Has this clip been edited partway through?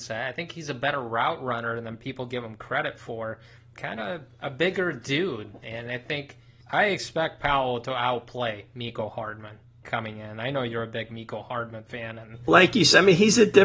yes; 1 cut; at 12.5 s

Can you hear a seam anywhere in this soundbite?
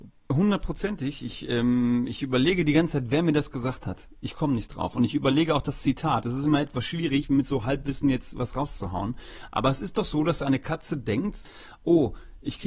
no; 0 cuts

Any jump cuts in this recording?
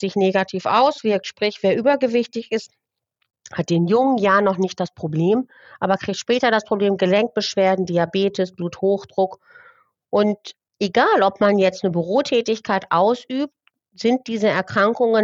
no; 0 cuts

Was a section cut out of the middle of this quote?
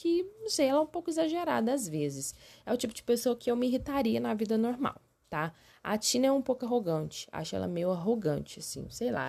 no; 0 cuts

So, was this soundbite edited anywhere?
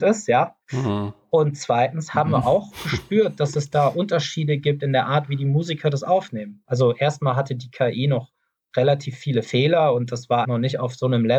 yes; 2 cuts; at 6.6 s, 10.4 s

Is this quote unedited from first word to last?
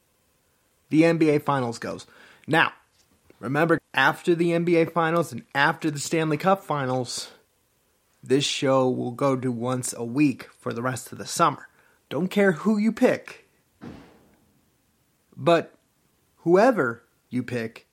no; 2 cuts; at 3.8 s, 12.0 s

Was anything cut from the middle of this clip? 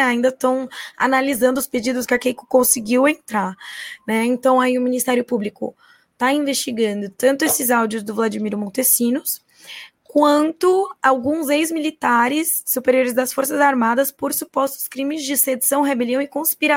no; 0 cuts

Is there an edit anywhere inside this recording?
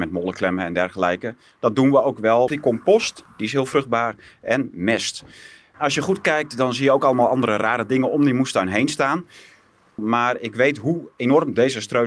yes; 2 cuts; at 2.5 s, 10.0 s

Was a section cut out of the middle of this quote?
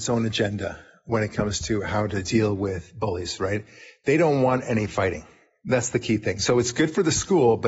no; 0 cuts

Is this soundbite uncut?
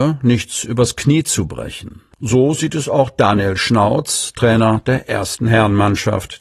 no; 1 cut; at 2.1 s

